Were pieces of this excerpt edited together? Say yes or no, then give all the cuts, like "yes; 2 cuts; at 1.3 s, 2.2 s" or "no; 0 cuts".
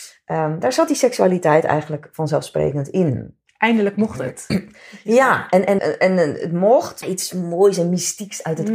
yes; 2 cuts; at 5.8 s, 7.0 s